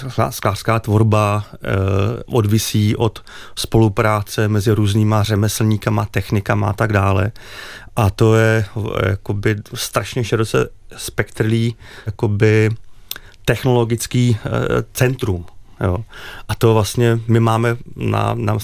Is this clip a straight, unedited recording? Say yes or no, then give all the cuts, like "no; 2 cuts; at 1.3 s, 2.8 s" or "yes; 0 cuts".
no; 1 cut; at 12.1 s